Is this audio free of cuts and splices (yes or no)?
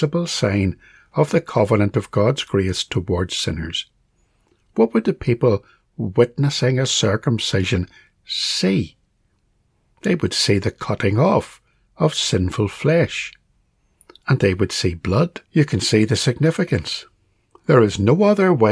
no